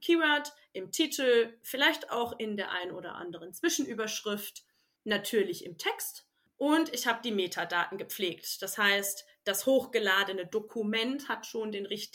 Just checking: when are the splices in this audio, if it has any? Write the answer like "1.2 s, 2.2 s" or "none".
none